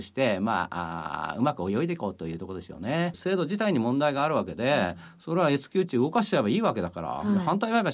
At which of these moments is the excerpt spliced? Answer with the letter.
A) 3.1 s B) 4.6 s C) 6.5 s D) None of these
A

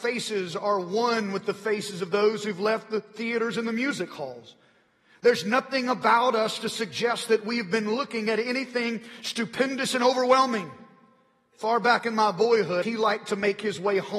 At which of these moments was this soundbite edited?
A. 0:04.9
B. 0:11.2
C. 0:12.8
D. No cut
C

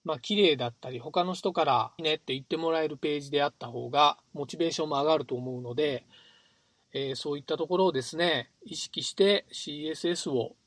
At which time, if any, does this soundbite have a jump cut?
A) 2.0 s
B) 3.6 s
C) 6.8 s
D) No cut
A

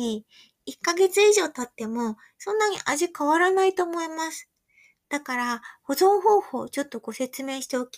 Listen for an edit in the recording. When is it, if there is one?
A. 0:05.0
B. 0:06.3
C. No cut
A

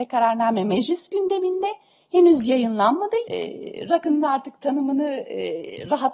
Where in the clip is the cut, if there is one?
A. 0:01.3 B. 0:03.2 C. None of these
B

